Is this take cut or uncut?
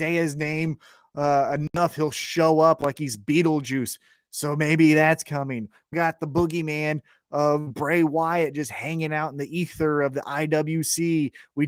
cut